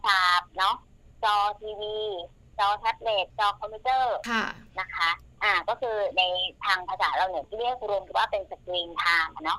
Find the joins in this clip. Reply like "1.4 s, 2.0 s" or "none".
8.1 s